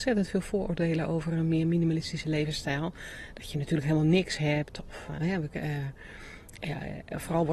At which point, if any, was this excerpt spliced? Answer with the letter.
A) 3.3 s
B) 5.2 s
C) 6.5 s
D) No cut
B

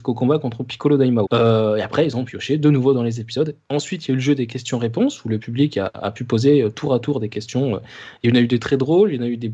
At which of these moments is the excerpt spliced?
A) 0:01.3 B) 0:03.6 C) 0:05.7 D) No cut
A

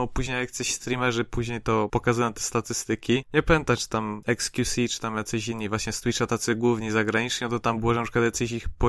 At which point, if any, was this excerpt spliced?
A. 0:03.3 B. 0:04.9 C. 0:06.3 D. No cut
D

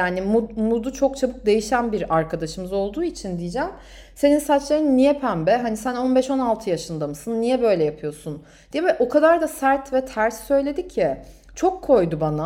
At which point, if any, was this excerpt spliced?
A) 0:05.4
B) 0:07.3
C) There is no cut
C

